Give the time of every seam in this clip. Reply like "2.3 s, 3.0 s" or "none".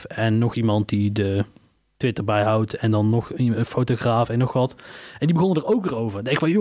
none

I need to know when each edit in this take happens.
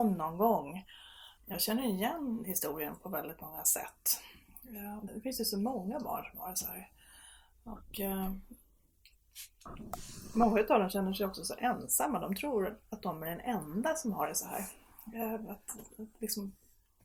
1.4 s, 5.1 s

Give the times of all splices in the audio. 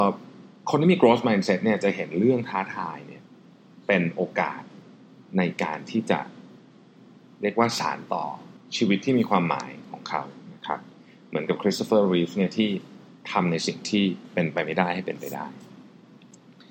none

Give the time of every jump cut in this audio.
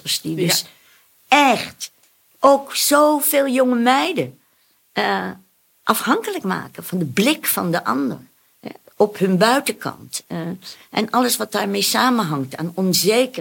none

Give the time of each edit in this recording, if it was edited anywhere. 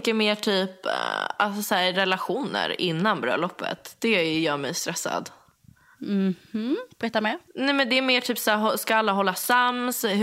7.5 s

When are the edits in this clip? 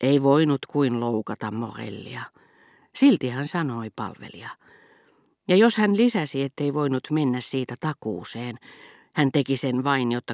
none

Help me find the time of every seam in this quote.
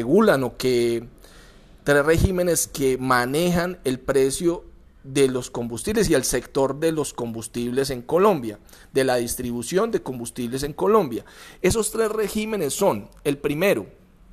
none

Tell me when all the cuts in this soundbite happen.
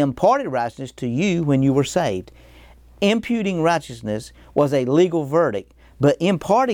none

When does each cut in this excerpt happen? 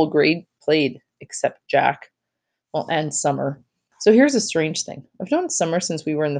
none

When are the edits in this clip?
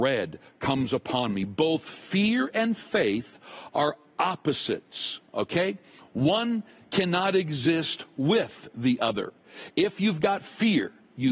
none

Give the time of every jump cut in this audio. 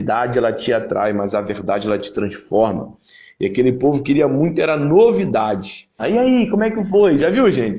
6.0 s

